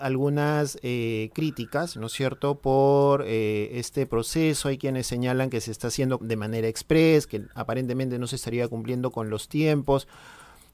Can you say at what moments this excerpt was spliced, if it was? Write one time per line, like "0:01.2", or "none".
0:06.2